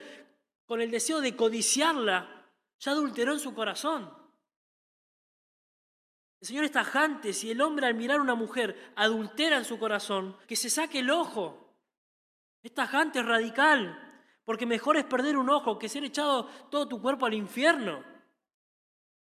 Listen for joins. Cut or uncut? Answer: cut